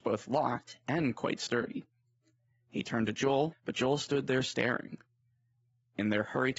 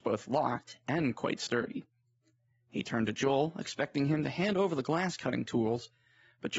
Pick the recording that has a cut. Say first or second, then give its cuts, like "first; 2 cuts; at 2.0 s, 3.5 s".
first; 1 cut; at 3.5 s